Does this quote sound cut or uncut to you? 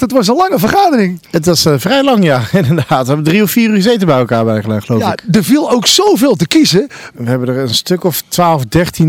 cut